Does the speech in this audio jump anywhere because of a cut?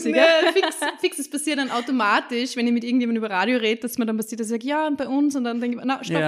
no; 0 cuts

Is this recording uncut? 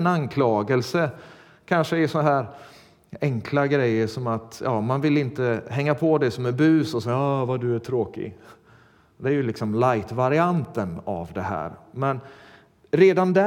yes; 0 cuts

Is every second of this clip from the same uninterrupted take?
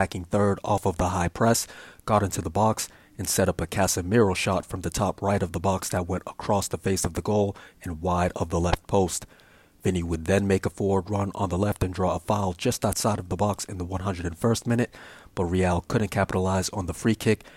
yes; 0 cuts

